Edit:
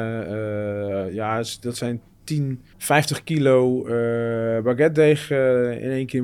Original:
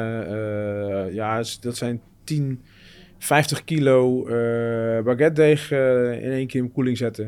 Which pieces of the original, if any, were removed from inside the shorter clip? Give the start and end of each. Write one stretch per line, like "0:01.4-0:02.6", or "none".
0:02.7-0:03.1